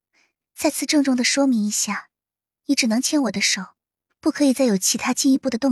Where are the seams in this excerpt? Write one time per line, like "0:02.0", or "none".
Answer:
none